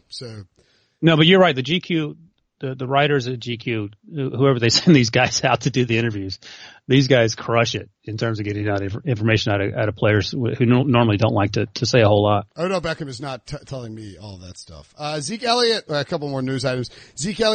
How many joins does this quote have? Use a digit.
1